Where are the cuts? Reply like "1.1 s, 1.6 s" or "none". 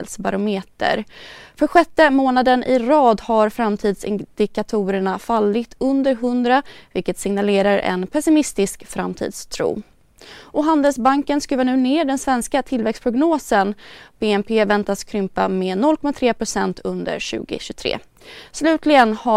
none

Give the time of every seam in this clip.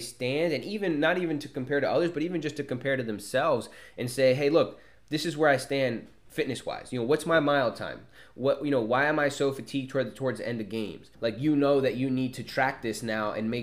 11.1 s

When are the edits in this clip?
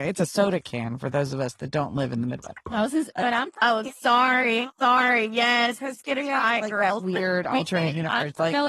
none

